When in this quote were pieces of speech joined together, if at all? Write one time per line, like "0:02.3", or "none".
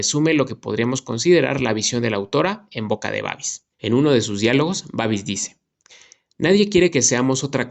0:03.7